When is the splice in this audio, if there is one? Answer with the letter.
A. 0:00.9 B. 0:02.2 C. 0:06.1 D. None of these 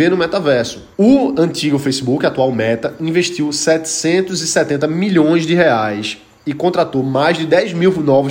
A